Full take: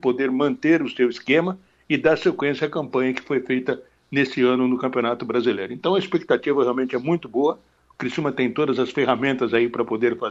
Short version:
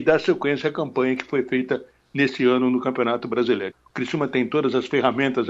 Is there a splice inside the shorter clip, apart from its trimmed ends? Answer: yes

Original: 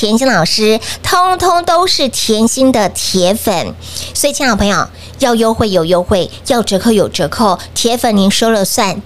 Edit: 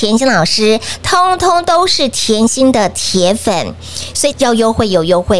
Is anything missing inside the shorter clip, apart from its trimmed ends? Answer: yes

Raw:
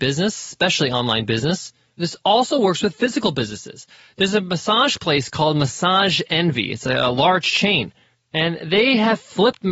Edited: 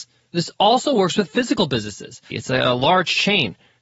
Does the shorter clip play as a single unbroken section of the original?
no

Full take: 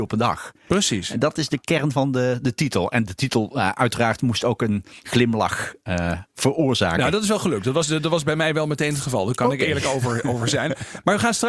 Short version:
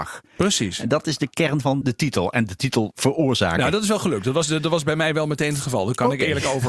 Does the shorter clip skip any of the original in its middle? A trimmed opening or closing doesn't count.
yes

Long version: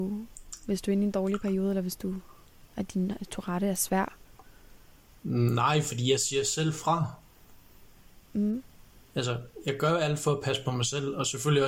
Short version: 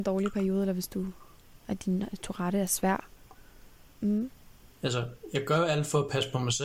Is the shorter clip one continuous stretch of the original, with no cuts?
no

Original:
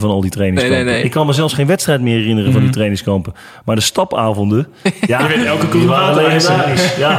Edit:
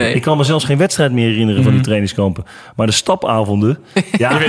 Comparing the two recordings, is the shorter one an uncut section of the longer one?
yes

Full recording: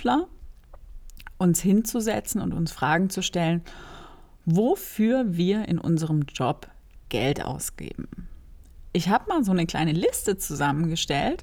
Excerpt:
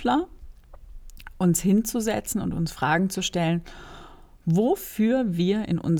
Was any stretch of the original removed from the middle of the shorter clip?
no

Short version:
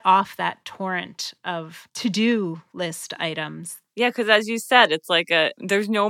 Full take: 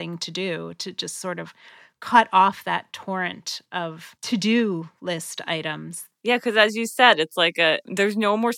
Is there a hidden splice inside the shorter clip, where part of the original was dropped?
no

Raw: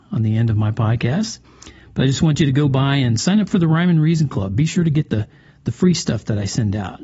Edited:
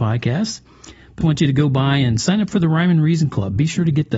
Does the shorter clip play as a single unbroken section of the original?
no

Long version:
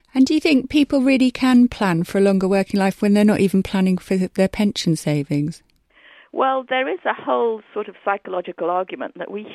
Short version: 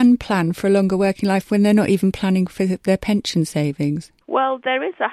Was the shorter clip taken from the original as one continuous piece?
no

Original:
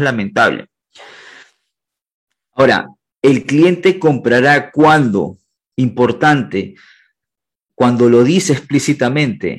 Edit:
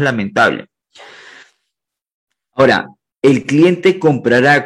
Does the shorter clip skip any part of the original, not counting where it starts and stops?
no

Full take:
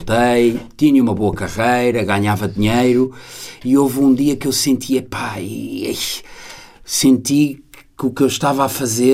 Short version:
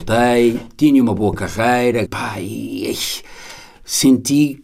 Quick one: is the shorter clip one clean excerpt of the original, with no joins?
no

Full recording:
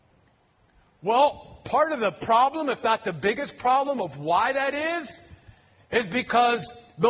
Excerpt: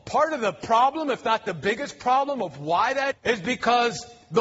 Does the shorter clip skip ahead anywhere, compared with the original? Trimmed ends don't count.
yes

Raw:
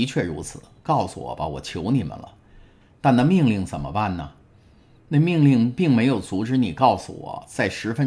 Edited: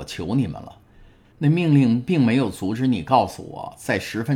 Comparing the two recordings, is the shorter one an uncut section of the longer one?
no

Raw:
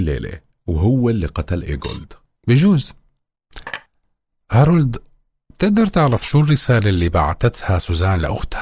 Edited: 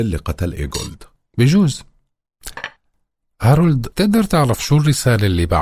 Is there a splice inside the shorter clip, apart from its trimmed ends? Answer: yes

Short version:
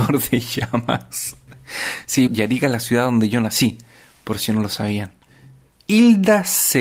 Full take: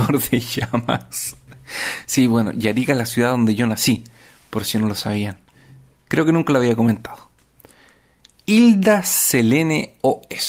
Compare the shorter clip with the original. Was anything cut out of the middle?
yes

